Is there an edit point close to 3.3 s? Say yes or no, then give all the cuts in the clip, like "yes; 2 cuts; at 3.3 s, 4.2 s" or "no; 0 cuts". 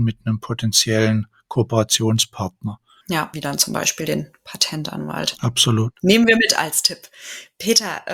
yes; 1 cut; at 3.3 s